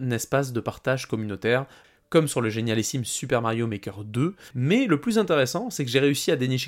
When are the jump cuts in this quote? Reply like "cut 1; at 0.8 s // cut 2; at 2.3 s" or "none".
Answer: cut 1; at 4.5 s